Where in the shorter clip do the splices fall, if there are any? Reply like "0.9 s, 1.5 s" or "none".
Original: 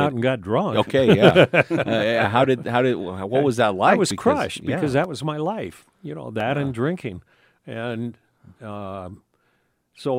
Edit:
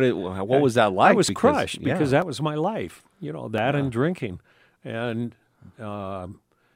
none